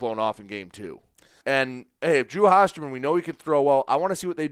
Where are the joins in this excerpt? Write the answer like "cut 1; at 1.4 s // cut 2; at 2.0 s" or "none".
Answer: cut 1; at 1.4 s